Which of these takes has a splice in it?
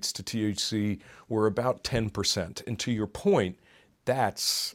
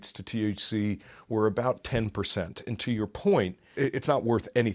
second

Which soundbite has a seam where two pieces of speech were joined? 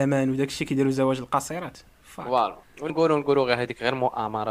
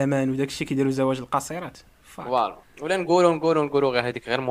first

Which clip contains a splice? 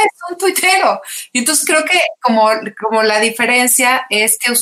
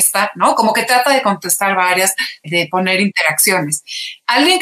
second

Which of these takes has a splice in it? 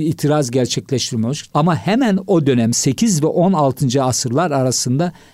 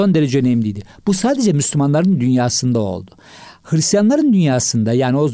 first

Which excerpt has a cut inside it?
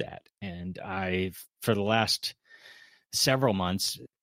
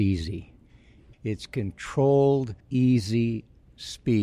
second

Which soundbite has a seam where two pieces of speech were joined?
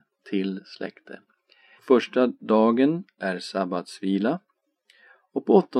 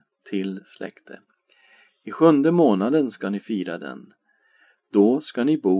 first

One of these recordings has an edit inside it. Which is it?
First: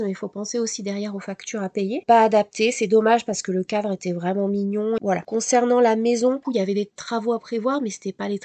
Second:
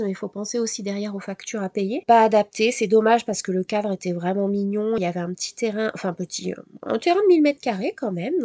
first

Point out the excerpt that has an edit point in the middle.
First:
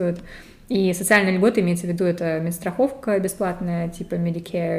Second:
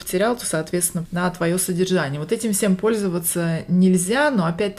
second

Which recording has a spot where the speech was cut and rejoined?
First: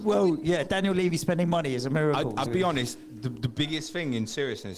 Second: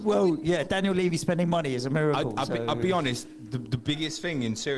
first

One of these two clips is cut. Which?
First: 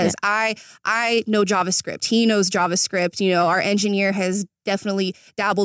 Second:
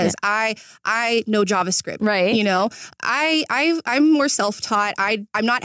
second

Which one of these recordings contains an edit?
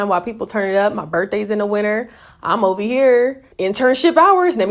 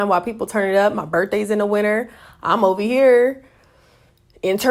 first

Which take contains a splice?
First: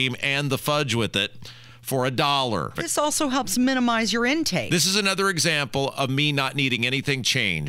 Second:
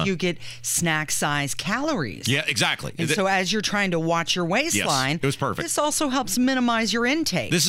first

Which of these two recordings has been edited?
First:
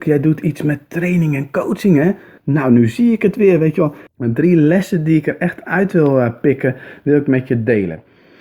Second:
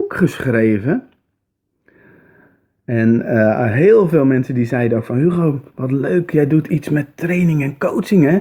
first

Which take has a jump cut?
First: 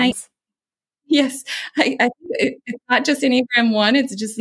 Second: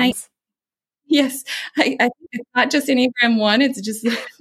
second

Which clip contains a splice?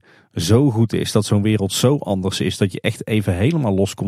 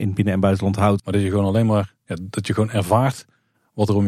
second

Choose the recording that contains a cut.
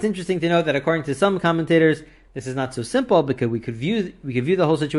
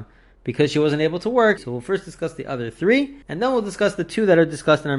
second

